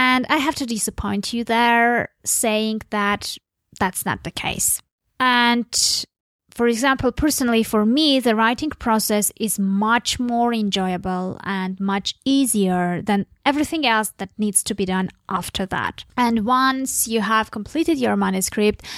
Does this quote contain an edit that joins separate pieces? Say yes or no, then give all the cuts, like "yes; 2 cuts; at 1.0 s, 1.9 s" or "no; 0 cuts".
no; 0 cuts